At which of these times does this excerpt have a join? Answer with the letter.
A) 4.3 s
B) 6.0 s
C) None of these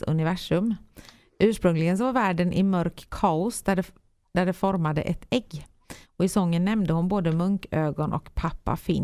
B